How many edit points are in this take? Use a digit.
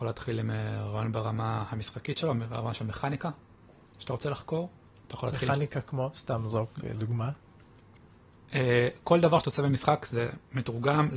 0